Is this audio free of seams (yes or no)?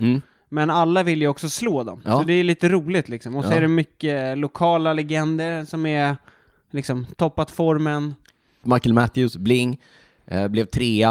no